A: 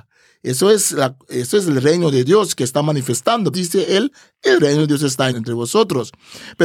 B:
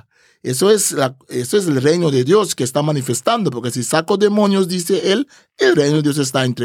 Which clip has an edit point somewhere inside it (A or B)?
A